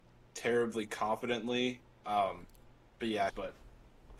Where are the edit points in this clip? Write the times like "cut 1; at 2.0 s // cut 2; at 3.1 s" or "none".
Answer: cut 1; at 3.3 s